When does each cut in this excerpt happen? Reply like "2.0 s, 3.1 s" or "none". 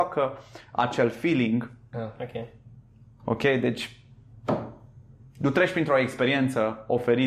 1.9 s

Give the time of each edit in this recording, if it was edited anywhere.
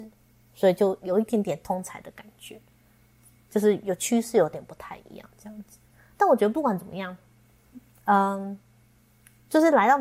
none

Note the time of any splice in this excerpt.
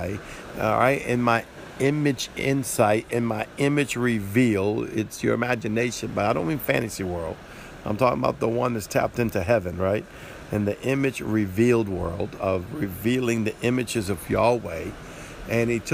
none

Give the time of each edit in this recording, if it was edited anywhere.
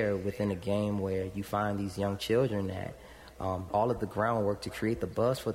3.7 s

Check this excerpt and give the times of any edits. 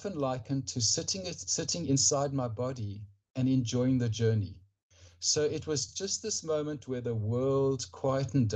none

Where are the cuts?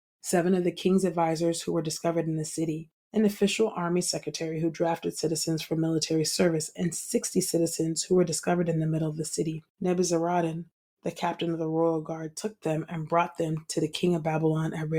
9.7 s

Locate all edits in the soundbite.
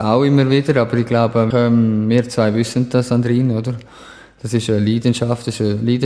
1.5 s

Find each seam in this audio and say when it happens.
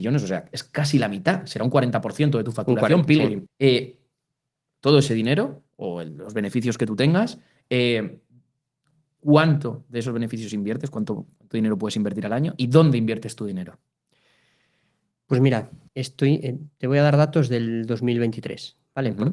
3.5 s, 15.9 s

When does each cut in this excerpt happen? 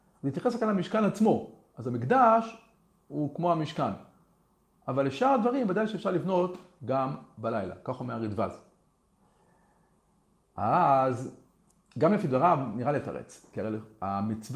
none

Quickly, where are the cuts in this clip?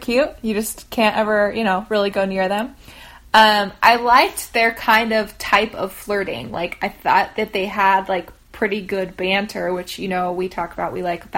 none

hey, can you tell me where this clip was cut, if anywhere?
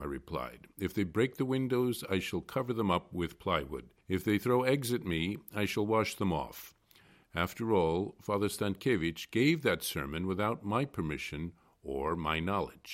4.0 s

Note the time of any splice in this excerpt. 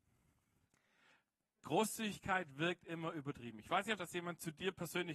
4.0 s

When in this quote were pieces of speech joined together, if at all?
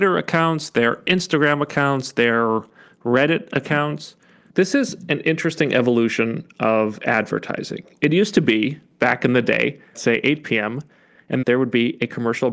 9.9 s, 11.4 s

